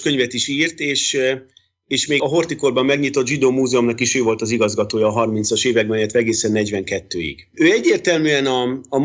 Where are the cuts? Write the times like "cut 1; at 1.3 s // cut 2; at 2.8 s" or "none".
cut 1; at 2.2 s